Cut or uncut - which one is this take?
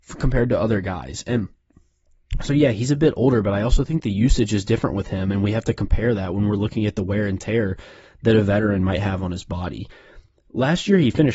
uncut